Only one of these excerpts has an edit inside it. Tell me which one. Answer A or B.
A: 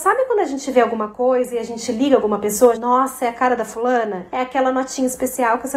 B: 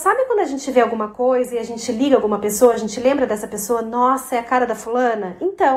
A